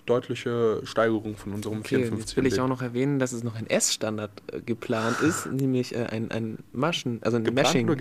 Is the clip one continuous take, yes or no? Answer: yes